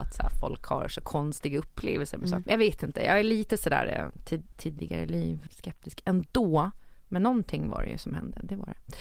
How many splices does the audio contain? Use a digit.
2